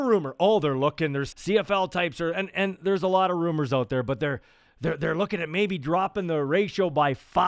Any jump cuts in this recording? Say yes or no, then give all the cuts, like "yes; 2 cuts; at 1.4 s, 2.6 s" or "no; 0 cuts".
yes; 1 cut; at 1.3 s